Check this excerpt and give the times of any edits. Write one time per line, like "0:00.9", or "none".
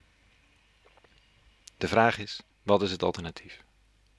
0:02.5